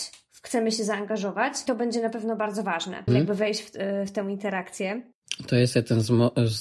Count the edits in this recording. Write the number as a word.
one